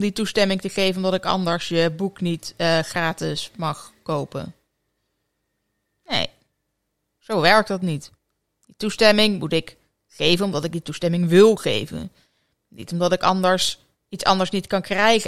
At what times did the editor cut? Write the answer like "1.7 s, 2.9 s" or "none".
none